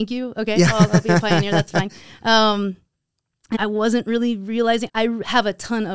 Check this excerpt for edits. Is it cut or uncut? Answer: cut